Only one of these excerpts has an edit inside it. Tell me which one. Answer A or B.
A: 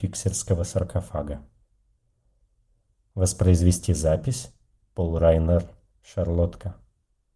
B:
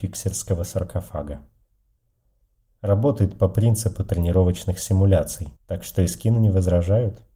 B